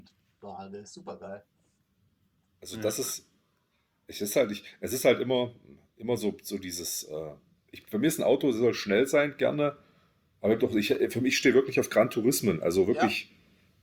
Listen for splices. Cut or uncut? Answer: uncut